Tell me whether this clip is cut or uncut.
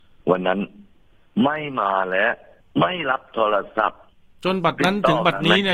uncut